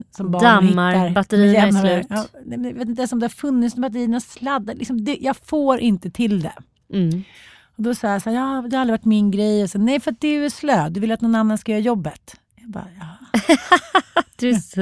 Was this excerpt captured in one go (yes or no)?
yes